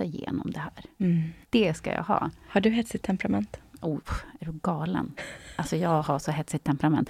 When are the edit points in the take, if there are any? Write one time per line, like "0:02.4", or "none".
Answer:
0:01.4